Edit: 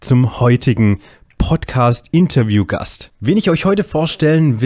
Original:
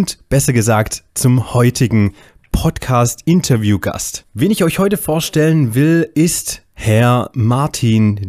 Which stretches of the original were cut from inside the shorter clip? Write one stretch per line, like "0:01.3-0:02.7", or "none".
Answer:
none